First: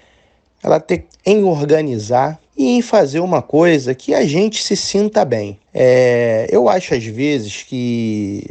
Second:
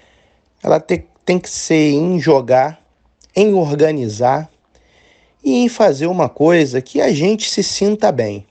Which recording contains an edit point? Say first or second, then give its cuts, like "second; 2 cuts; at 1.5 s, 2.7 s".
first; 3 cuts; at 1.1 s, 2.5 s, 5.6 s